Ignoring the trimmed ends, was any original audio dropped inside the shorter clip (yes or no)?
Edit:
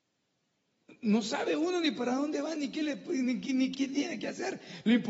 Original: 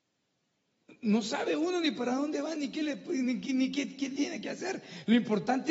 yes